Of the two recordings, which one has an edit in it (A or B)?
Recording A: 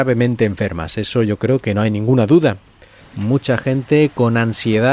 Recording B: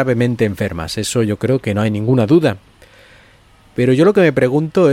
A